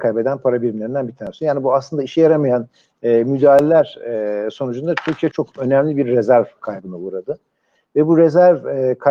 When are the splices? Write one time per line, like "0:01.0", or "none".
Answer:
0:05.3